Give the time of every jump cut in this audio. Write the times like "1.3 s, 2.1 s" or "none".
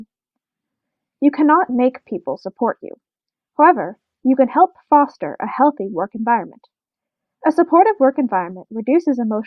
none